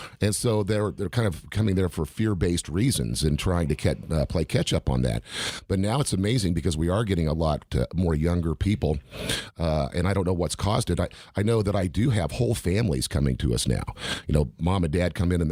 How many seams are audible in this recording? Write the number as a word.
zero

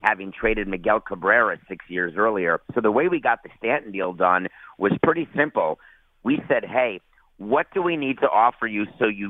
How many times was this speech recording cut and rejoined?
one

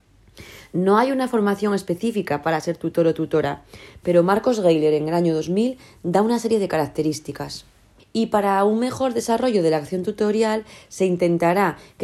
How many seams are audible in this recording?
one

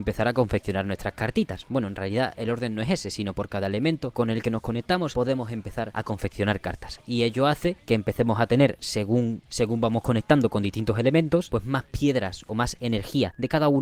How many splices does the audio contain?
zero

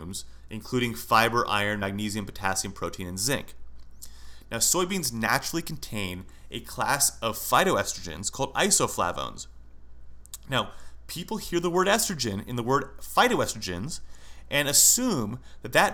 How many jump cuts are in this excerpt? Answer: zero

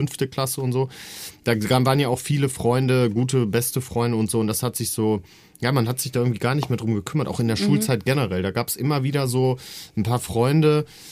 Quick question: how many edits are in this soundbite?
zero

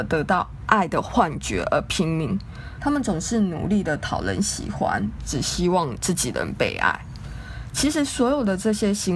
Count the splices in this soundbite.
two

